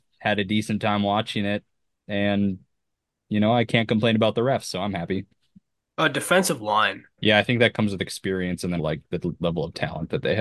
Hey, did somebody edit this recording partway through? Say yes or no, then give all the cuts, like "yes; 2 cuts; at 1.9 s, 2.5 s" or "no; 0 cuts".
yes; 2 cuts; at 7.2 s, 8.8 s